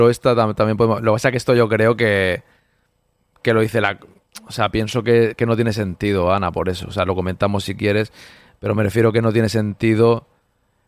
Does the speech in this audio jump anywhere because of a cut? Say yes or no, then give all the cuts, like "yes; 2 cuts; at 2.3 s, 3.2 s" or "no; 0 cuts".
no; 0 cuts